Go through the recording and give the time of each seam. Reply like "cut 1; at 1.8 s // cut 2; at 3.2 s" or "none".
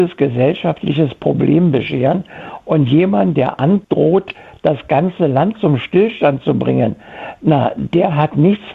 none